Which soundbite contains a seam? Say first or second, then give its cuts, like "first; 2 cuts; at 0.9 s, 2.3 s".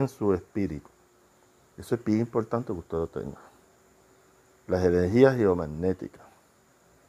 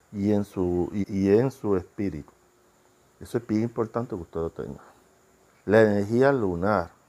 second; 2 cuts; at 1.0 s, 5.5 s